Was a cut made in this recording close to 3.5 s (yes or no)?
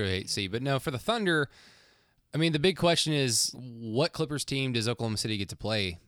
yes